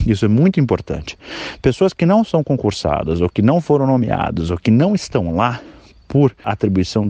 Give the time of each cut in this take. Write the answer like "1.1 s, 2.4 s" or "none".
none